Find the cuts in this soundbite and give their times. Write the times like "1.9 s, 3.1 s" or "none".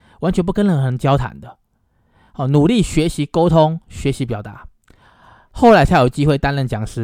none